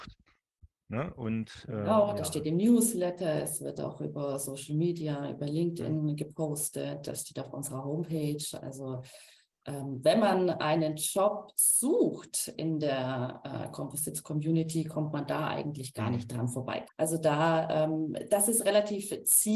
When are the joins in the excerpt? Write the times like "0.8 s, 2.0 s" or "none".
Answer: 16.8 s